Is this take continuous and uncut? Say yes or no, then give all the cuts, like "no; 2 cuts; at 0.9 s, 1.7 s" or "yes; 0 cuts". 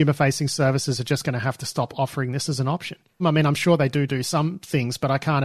no; 1 cut; at 3.2 s